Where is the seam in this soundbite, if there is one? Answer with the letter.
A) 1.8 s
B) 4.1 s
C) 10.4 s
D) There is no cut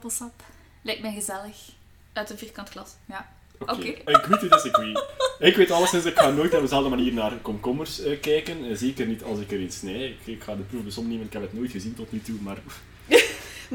B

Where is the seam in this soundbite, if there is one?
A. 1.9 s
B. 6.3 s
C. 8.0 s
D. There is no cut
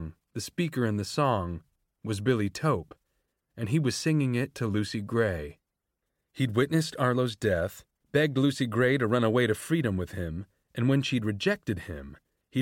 C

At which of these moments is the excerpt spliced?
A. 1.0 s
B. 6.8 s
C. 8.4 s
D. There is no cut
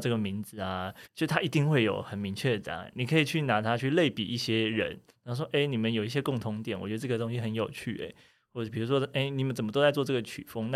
A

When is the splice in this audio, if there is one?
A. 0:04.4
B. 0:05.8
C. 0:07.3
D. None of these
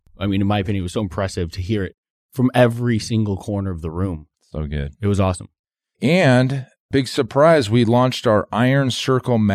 D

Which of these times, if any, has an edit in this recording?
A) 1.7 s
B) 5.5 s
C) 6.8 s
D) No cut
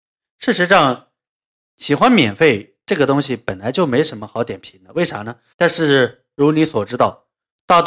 B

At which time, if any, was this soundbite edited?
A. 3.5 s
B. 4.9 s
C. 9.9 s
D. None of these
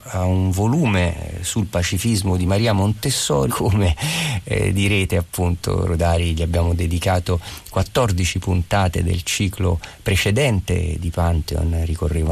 A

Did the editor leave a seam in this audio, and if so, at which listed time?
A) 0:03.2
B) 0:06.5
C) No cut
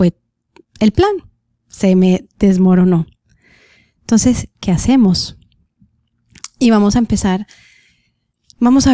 C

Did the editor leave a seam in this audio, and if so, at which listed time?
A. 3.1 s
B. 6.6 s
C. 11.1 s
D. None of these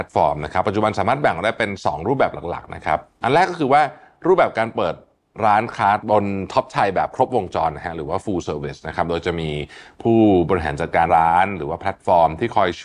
C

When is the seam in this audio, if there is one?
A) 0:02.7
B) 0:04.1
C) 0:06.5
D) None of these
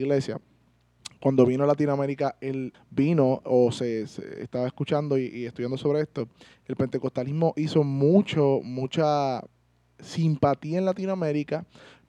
A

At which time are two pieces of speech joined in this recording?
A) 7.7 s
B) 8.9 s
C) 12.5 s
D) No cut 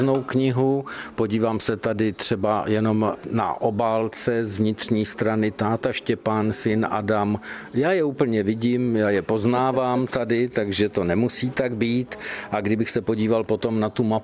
D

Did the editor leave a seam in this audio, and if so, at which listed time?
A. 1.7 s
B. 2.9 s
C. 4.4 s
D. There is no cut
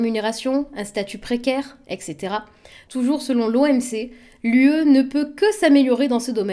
B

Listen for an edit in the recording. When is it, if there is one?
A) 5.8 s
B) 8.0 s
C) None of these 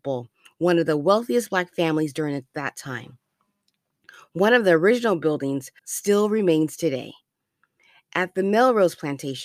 A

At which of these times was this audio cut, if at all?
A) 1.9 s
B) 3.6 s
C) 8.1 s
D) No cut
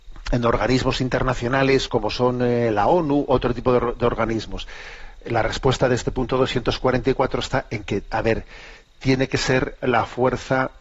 A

